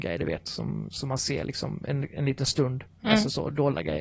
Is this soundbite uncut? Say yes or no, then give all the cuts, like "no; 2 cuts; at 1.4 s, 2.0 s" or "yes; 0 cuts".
no; 1 cut; at 3.0 s